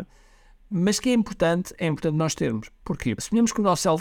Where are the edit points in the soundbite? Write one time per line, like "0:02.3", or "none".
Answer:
none

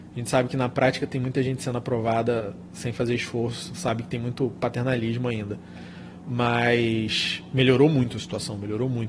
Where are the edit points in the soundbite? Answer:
none

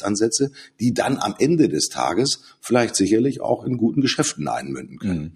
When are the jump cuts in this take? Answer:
none

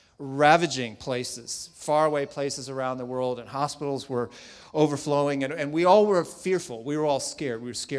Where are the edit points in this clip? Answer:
none

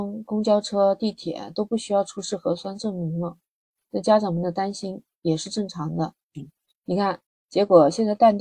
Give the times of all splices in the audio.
0:07.3

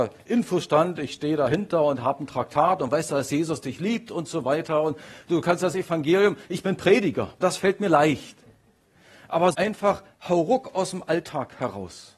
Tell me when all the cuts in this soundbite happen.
0:07.4
0:09.5

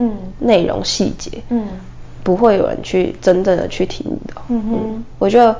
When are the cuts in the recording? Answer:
none

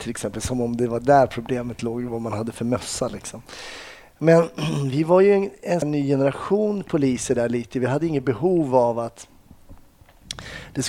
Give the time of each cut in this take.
0:05.8

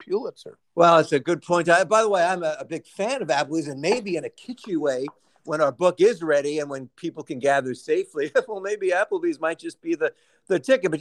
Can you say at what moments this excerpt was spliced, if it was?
none

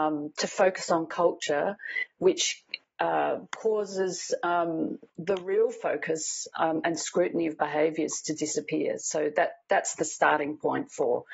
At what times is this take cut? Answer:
0:05.1

